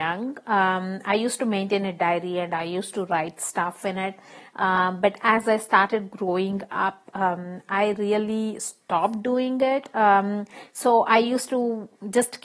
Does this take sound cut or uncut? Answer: uncut